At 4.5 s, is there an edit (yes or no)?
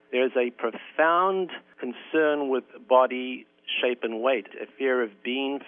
yes